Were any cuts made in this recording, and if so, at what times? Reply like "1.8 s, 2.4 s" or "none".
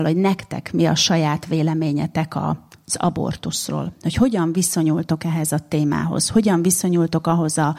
none